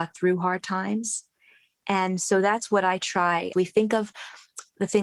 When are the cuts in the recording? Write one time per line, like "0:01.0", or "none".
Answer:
0:03.5